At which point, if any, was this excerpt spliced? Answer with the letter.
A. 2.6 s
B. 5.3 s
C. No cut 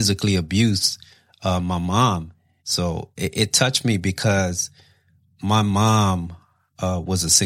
A